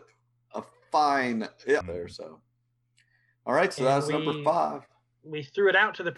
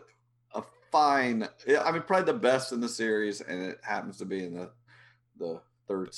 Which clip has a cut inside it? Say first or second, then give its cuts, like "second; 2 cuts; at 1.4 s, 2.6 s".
first; 1 cut; at 1.8 s